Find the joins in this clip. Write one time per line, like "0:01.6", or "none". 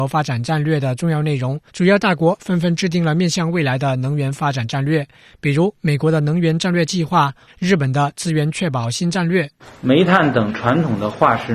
0:01.7
0:07.5
0:09.6